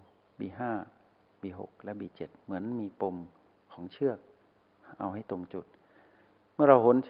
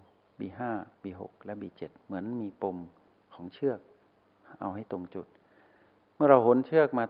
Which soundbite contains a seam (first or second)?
second